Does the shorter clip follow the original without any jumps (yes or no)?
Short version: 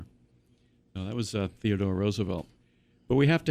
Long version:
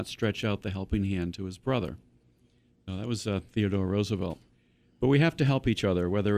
yes